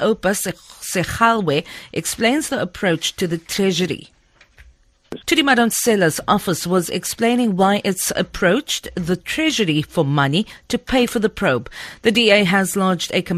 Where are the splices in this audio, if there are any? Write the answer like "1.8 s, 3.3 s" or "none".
5.2 s